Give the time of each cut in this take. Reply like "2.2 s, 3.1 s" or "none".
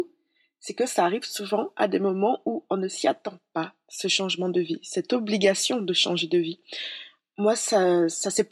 none